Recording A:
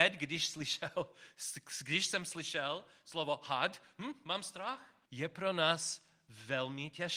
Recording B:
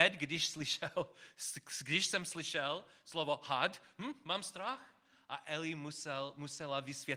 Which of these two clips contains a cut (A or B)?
A